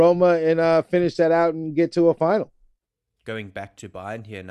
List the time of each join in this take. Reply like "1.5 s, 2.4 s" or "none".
none